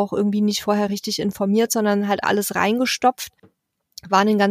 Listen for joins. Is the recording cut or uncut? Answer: cut